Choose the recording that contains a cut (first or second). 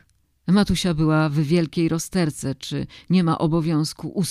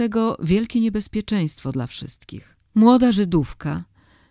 second